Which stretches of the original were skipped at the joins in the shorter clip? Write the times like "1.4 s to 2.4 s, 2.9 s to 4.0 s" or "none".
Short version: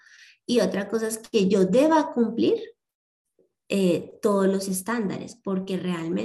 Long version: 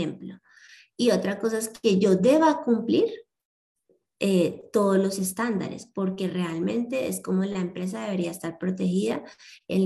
none